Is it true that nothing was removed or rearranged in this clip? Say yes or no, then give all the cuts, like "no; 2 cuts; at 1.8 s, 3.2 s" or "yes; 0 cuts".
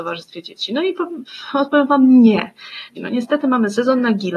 no; 1 cut; at 3.0 s